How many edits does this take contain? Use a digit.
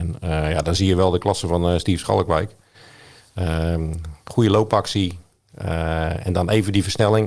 0